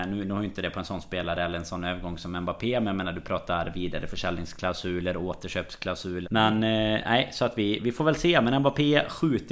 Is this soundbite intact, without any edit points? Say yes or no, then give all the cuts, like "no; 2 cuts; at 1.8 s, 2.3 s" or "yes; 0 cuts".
no; 1 cut; at 6.2 s